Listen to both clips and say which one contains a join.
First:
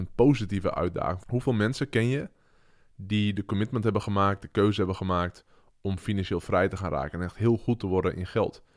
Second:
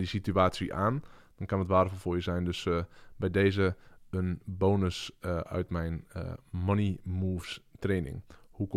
first; 1 cut; at 1.2 s

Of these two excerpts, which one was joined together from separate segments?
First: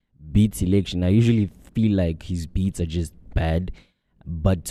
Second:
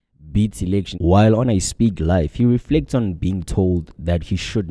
second; 1 cut; at 0.9 s

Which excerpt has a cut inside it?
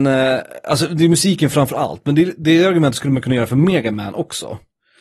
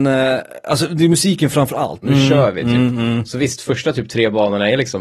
second; 1 cut; at 2.0 s

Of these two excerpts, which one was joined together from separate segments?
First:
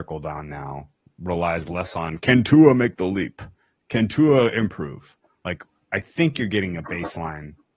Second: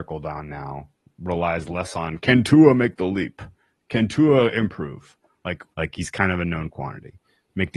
second; 1 cut; at 5.7 s

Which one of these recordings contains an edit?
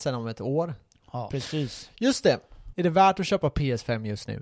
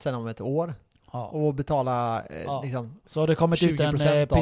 first; 2 cuts; at 1.3 s, 2.7 s

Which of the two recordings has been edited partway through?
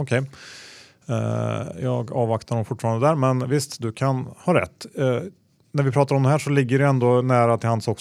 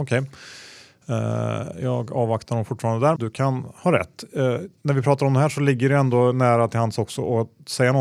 second; 2 cuts; at 3.2 s, 4.8 s

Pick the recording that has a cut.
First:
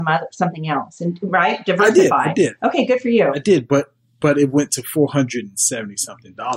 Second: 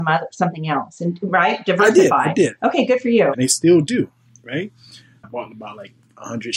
second; 2 cuts; at 3.3 s, 5.2 s

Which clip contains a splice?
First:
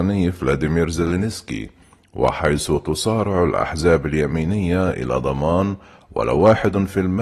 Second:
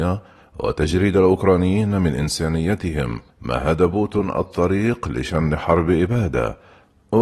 second; 1 cut; at 3.3 s

